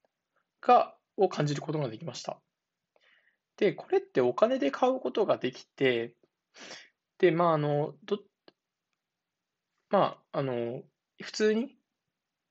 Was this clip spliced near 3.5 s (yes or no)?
no